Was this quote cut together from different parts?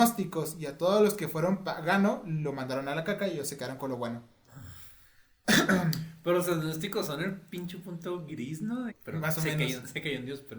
yes; 1 cut; at 8.9 s

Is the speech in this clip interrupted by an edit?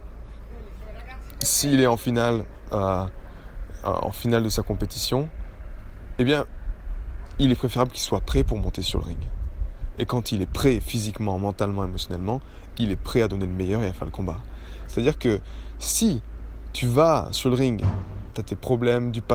yes; 2 cuts; at 14.9 s, 18.3 s

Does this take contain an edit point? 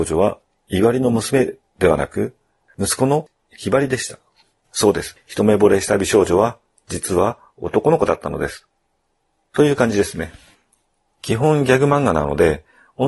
no; 0 cuts

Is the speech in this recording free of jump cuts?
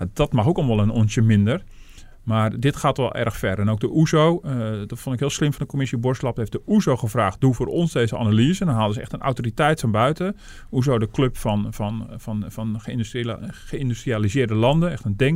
yes; 0 cuts

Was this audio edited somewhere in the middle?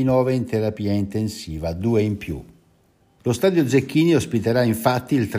yes; 1 cut; at 3.2 s

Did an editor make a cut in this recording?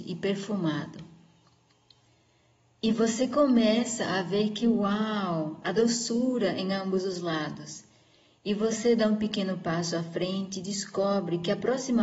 no; 0 cuts

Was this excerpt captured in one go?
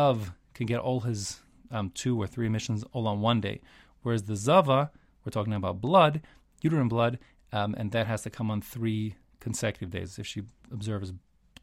yes; 0 cuts

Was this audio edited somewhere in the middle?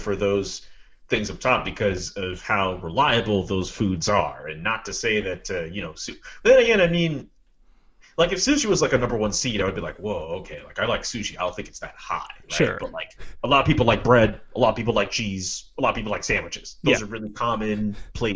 no; 0 cuts

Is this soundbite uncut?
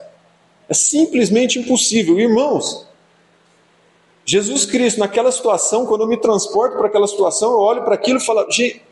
yes; 0 cuts

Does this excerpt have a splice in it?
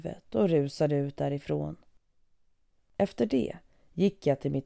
no; 0 cuts

